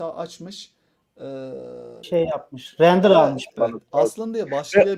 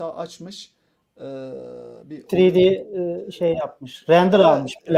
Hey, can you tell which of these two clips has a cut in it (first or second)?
first